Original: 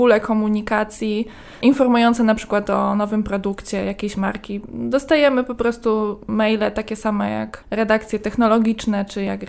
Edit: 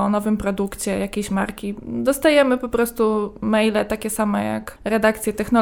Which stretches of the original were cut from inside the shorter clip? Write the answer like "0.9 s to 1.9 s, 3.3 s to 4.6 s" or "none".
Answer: none